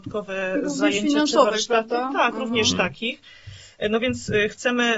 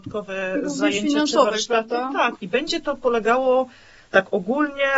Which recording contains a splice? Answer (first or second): second